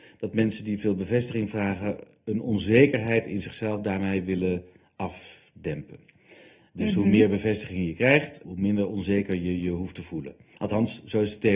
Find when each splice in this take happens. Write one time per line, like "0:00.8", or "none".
0:08.4